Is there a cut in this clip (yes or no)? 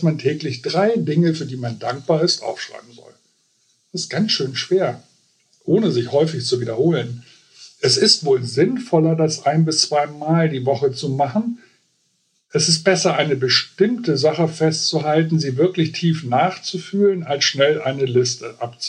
no